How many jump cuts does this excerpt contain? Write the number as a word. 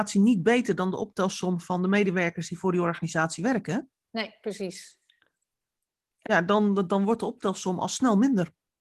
one